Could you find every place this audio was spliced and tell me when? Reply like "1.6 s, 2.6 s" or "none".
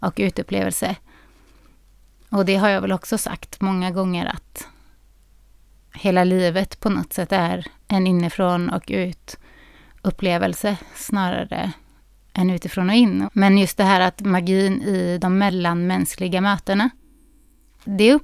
13.2 s